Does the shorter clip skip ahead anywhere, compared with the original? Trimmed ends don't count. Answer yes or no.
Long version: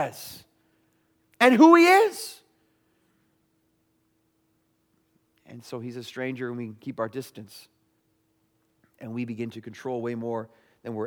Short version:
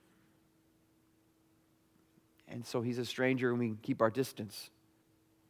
no